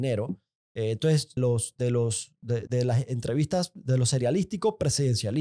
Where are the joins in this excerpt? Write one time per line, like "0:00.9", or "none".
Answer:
0:01.4
0:02.7